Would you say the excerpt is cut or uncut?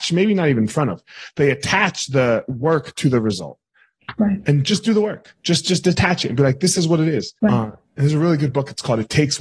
cut